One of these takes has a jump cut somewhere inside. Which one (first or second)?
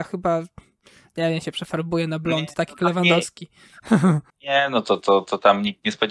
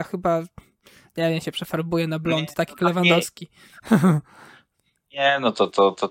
first